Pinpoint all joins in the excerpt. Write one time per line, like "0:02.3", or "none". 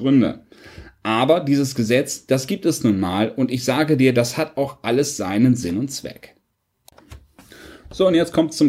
none